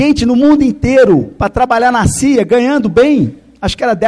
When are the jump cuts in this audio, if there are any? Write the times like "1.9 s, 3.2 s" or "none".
none

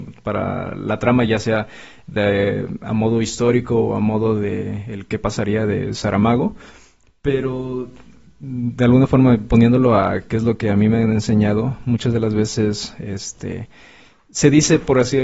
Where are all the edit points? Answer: none

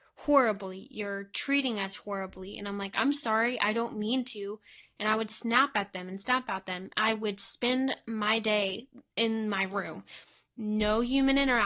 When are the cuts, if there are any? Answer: 9.1 s

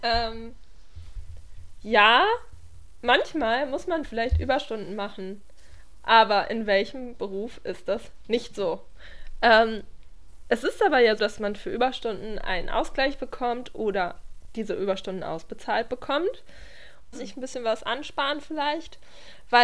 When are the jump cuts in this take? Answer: 11.2 s, 17.1 s

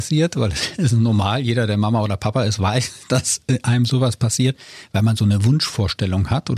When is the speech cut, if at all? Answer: none

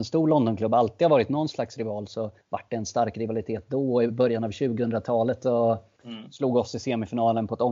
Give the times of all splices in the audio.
2.4 s, 6.0 s

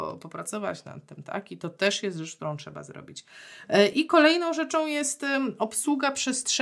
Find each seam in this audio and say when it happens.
none

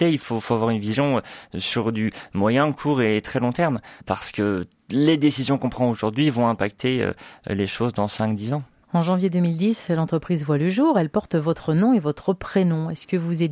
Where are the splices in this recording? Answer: none

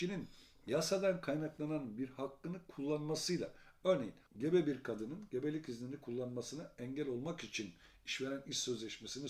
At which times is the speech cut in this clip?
4.3 s

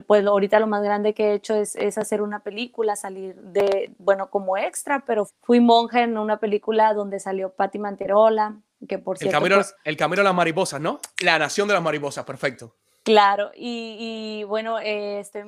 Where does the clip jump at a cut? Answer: 5.3 s, 11.2 s

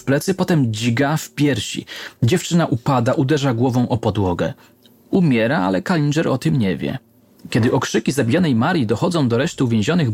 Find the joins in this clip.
none

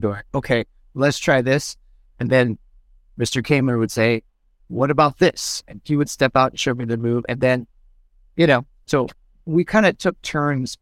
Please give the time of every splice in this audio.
none

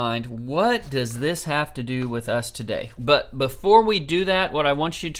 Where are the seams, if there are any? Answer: 3.0 s

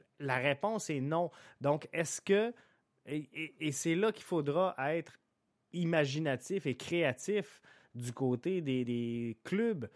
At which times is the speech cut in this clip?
8.8 s

